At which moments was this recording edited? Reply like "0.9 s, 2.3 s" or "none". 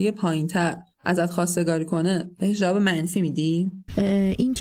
0.9 s